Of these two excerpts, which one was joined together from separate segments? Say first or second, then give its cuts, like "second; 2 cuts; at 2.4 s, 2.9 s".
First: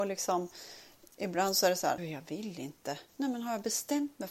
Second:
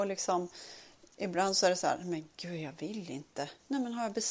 first; 1 cut; at 2.0 s